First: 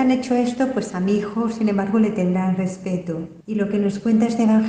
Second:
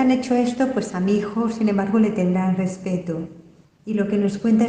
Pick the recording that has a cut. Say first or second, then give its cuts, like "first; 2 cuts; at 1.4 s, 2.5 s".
first; 1 cut; at 3.4 s